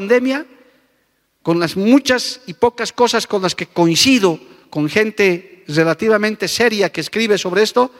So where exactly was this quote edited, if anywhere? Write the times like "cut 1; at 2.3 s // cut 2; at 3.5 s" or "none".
none